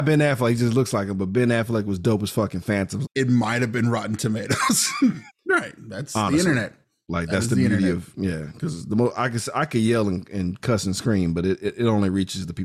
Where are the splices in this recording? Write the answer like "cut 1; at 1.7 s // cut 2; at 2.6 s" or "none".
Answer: cut 1; at 3.0 s // cut 2; at 5.3 s